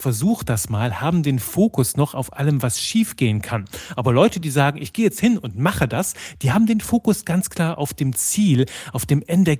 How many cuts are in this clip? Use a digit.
0